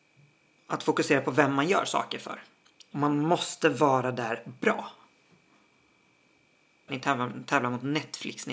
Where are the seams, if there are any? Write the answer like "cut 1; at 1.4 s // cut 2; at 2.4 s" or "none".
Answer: cut 1; at 2.9 s // cut 2; at 6.9 s